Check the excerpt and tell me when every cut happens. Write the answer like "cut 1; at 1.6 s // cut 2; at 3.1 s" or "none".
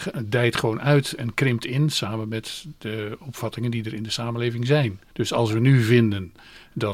cut 1; at 5.1 s